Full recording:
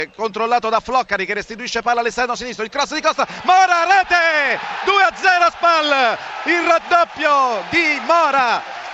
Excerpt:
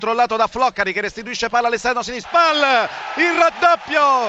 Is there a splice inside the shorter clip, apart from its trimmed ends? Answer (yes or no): yes